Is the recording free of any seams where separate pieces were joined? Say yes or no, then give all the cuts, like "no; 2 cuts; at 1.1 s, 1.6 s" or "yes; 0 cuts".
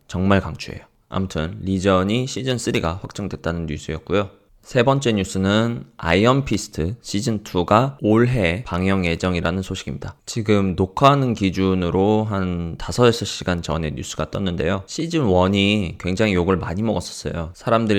yes; 0 cuts